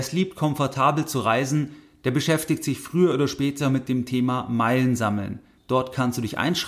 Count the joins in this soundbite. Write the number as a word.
one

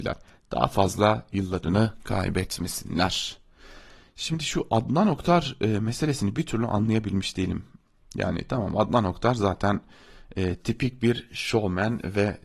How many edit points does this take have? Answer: zero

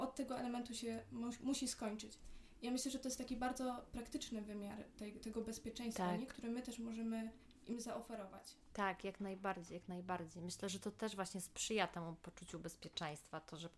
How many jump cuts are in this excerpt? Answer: zero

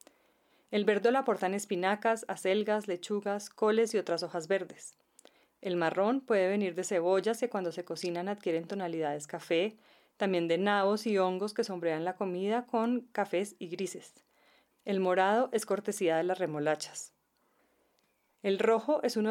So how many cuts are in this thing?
one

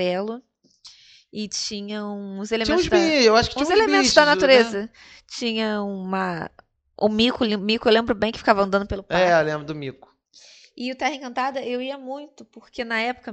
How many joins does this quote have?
zero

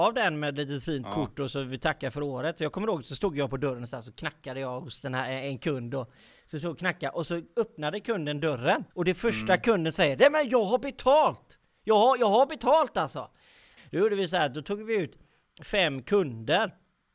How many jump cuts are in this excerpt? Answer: two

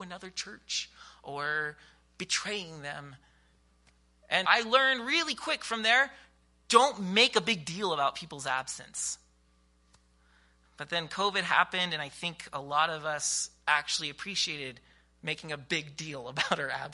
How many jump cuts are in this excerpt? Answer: one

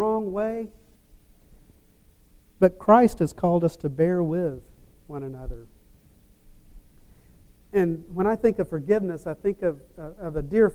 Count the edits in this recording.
zero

